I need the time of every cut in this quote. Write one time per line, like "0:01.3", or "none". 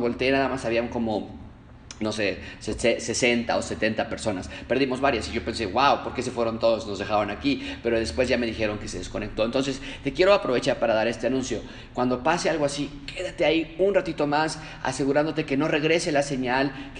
none